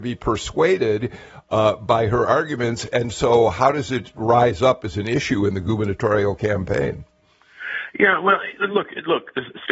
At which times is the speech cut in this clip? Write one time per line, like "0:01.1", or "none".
none